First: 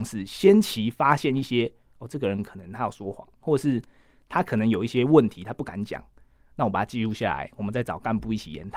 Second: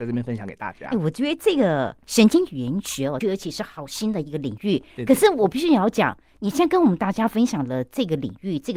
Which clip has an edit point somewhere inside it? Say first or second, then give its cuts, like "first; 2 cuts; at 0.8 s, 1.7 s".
second; 1 cut; at 3.2 s